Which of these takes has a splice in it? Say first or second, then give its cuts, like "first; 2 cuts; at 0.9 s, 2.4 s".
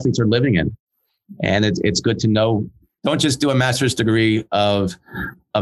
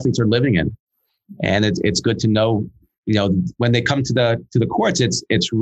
first; 1 cut; at 3.0 s